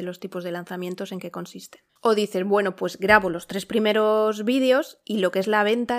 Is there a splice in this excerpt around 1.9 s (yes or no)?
yes